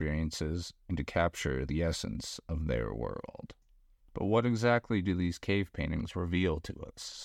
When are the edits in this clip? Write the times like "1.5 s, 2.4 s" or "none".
none